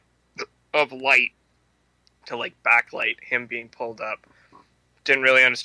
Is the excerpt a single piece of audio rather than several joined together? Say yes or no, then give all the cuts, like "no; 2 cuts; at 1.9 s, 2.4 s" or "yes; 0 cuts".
yes; 0 cuts